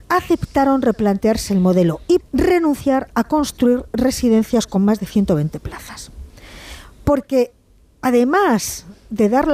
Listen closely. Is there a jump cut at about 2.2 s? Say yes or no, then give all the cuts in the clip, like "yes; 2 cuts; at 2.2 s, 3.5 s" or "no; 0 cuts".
yes; 1 cut; at 2.2 s